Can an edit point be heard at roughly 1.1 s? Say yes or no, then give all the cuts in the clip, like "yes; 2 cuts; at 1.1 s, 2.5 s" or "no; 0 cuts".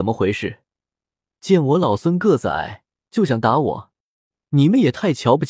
no; 1 cut; at 3.0 s